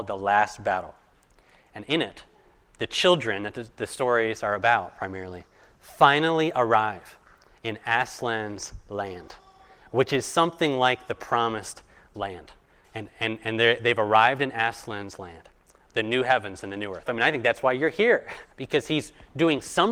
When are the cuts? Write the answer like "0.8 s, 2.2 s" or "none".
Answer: 12.8 s, 17.1 s, 18.5 s

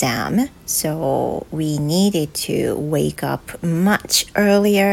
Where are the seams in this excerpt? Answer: none

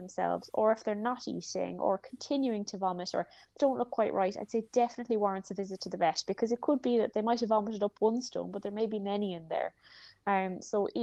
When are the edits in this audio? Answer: 3.6 s

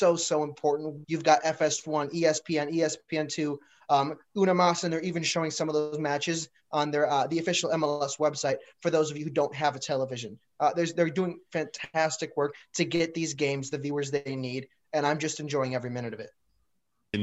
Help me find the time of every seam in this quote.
1.0 s

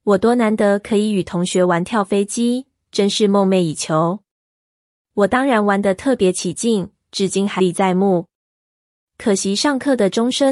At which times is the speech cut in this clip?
7.6 s

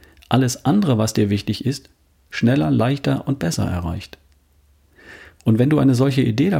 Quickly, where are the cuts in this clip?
none

